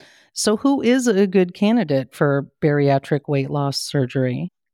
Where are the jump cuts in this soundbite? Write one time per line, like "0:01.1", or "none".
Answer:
none